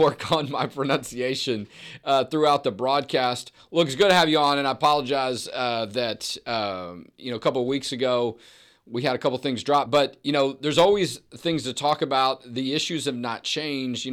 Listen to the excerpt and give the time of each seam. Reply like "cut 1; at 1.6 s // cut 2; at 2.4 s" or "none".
none